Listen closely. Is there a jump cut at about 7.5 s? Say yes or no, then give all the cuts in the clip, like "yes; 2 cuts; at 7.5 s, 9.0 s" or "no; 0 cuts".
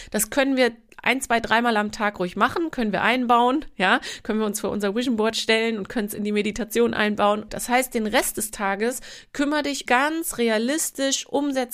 yes; 2 cuts; at 7.5 s, 9.9 s